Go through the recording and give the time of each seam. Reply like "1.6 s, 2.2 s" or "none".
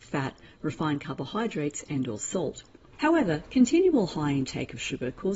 2.9 s